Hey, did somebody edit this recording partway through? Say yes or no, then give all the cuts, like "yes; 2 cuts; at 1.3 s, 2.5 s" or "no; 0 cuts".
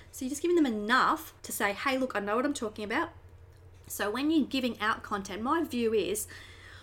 yes; 2 cuts; at 1.4 s, 3.8 s